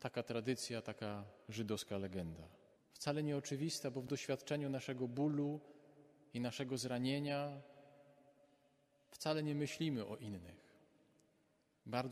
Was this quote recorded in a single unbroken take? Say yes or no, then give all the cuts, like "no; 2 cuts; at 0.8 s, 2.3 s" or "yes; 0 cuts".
no; 1 cut; at 2.8 s